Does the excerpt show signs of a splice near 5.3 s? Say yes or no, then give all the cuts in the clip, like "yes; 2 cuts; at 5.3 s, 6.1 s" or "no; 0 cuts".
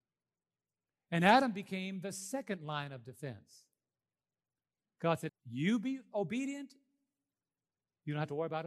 yes; 1 cut; at 5.3 s